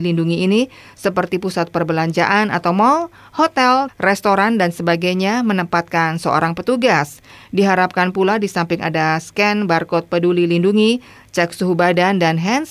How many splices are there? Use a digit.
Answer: 1